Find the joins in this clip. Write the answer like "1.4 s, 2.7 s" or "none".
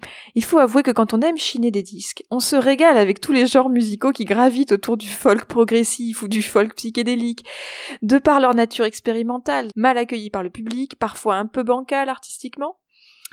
9.7 s